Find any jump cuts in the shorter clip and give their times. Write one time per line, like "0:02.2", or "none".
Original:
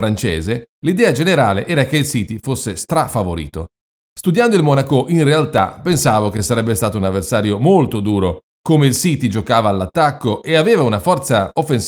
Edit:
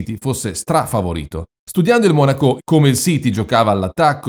0:01.5
0:02.6